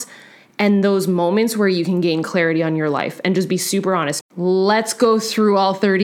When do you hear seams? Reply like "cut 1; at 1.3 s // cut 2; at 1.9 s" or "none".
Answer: cut 1; at 4.2 s

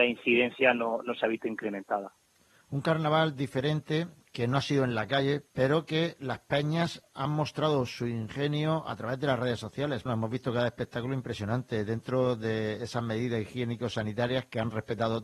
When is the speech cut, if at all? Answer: cut 1; at 5.5 s // cut 2; at 10.1 s

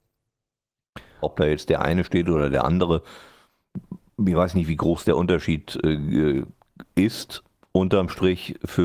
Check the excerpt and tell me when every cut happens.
cut 1; at 1.2 s

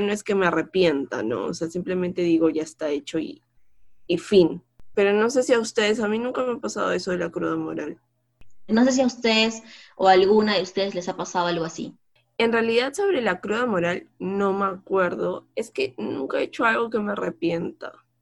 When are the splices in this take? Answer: cut 1; at 2.5 s // cut 2; at 8.7 s

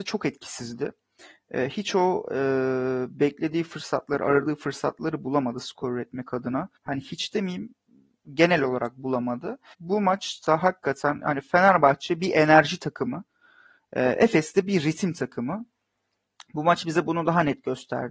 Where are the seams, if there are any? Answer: cut 1; at 6.8 s // cut 2; at 9.7 s

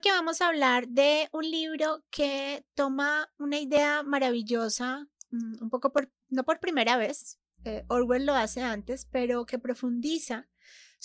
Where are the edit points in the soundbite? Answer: none

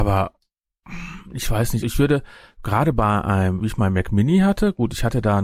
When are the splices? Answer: cut 1; at 1.8 s // cut 2; at 3.6 s

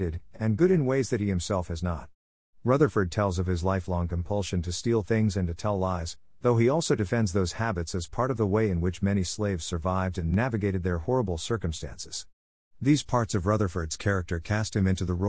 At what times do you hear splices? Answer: none

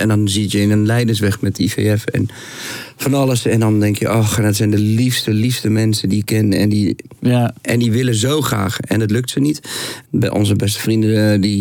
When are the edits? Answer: cut 1; at 10.0 s

